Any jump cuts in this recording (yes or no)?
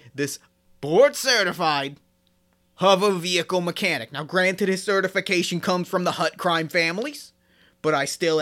no